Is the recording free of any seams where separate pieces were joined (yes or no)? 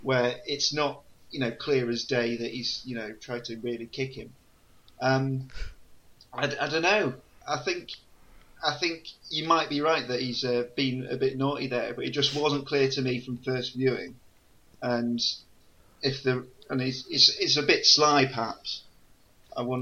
yes